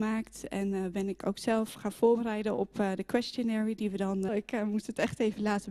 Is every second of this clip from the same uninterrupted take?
no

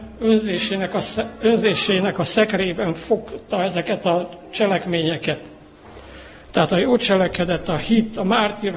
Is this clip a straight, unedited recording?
yes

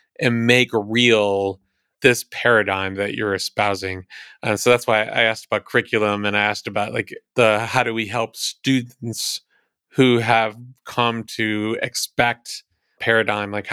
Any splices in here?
no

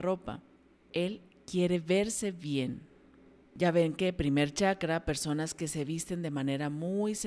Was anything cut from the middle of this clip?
no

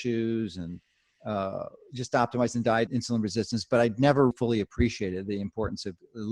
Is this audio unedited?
no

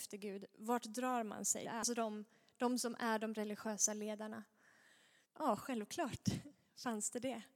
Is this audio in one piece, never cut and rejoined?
no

